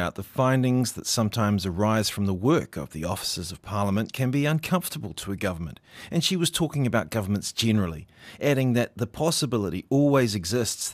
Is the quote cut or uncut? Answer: uncut